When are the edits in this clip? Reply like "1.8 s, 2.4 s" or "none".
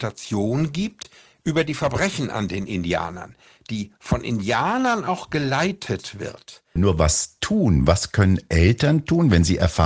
6.8 s